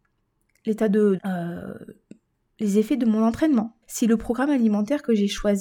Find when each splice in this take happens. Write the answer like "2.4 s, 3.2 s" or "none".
1.2 s, 3.8 s